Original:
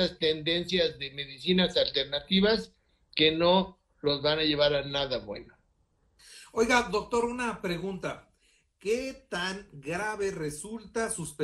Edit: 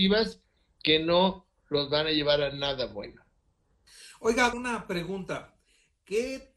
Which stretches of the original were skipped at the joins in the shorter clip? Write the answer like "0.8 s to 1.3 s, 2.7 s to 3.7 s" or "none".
6.9 s to 7.3 s